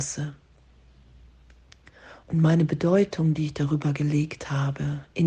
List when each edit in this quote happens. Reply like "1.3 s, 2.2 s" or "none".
2.2 s